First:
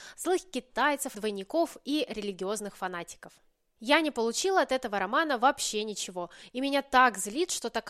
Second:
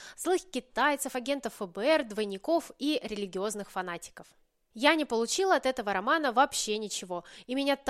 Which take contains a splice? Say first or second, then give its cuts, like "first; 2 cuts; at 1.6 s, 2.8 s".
first; 1 cut; at 1.1 s